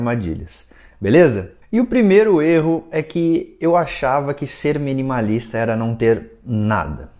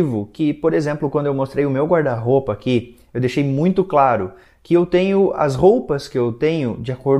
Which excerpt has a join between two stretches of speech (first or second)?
first